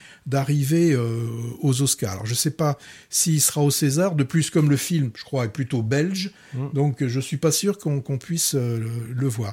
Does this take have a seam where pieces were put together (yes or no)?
no